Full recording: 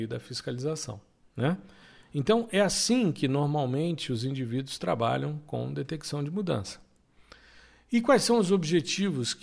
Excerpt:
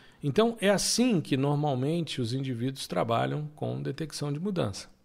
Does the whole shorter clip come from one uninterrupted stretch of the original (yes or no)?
yes